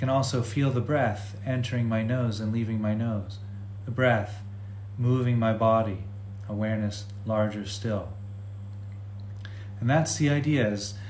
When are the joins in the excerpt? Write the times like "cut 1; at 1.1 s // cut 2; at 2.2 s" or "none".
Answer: cut 1; at 3.8 s